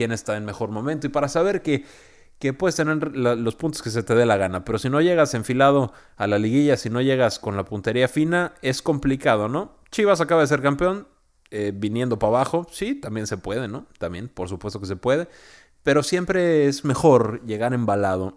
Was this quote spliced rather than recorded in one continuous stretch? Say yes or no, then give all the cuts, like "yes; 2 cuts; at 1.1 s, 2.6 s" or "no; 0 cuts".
no; 0 cuts